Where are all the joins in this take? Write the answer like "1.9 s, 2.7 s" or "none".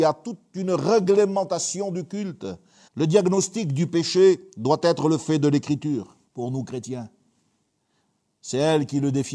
2.9 s, 6.3 s